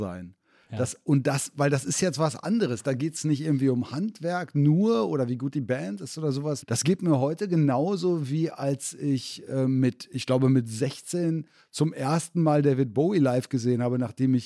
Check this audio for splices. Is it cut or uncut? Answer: cut